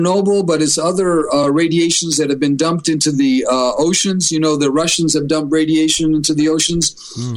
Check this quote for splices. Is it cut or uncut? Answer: uncut